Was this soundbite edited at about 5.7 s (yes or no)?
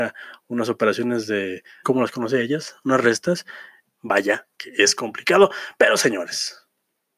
no